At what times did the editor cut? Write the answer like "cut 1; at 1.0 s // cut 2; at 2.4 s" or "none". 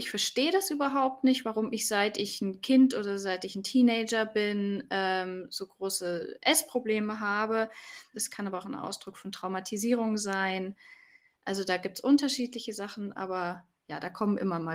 cut 1; at 8.1 s